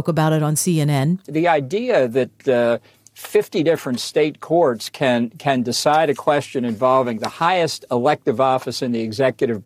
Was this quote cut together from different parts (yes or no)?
no